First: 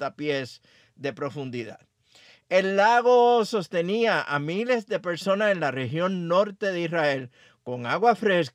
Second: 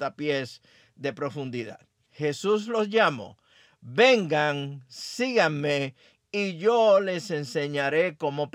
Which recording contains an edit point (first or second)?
second